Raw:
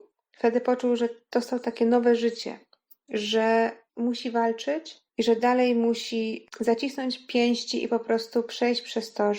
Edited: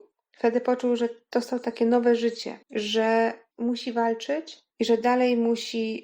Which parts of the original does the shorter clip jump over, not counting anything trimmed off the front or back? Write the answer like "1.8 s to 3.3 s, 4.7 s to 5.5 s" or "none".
2.6 s to 3.0 s